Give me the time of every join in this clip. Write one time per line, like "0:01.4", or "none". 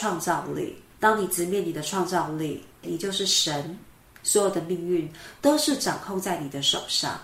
0:02.8